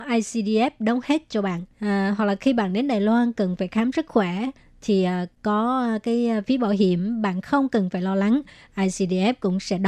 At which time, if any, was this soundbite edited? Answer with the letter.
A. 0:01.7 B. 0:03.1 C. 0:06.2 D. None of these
A